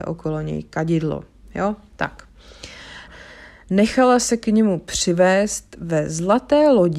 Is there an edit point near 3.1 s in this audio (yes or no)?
yes